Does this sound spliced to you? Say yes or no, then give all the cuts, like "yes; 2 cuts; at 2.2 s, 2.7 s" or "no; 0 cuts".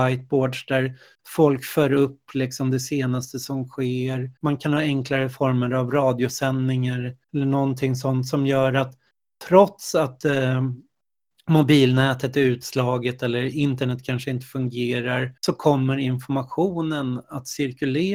yes; 3 cuts; at 4.4 s, 7.2 s, 15.4 s